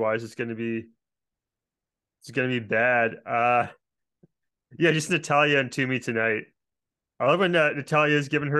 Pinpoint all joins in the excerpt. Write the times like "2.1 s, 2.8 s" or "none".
7.1 s

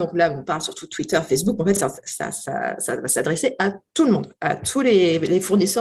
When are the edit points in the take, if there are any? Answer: none

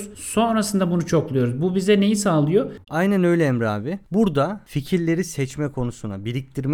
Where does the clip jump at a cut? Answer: 2.8 s

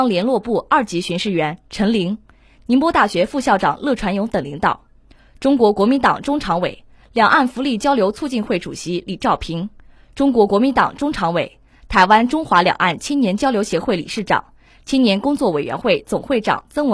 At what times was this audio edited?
none

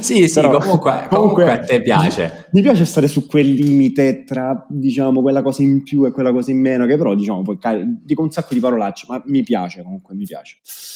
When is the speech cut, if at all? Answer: none

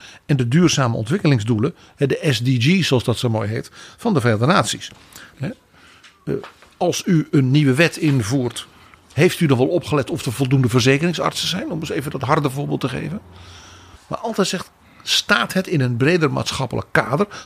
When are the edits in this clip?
5.3 s, 14.0 s

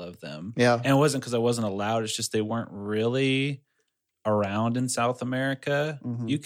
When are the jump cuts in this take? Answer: none

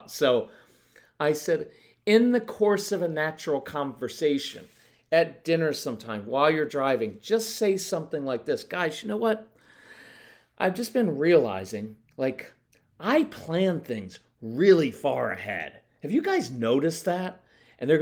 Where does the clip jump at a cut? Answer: none

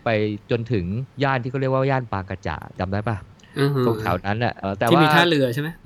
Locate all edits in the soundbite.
1.1 s, 4.6 s

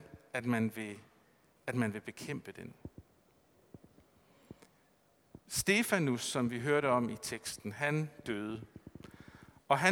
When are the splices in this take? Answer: 5.4 s

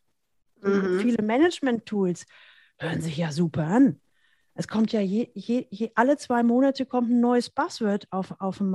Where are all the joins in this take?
none

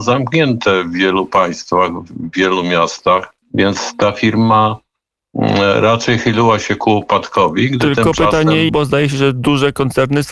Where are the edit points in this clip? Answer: 3.4 s, 8.7 s

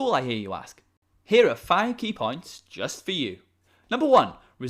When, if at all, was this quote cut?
none

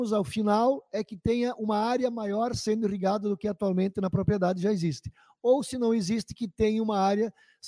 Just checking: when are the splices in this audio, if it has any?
none

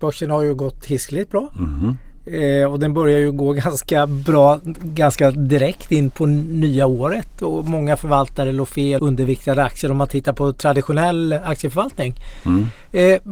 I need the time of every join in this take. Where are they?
9.0 s

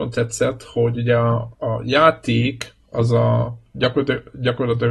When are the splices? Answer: 1.5 s

